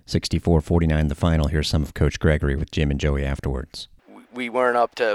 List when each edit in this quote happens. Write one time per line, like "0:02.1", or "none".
none